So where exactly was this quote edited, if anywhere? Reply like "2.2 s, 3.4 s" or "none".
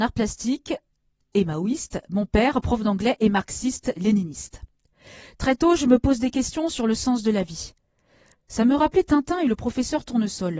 8.3 s